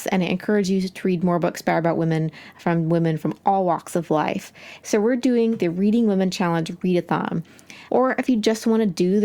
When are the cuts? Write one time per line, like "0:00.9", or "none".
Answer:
0:04.8
0:07.9